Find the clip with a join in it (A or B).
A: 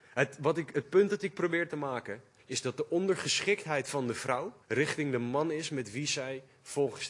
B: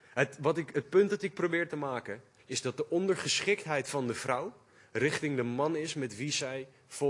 A